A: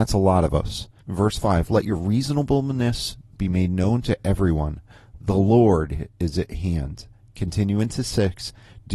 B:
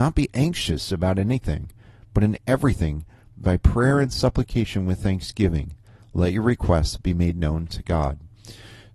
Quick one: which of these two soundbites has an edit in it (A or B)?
A